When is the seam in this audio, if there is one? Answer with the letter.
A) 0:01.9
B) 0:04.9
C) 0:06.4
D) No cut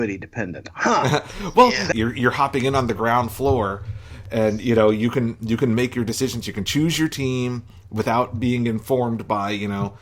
A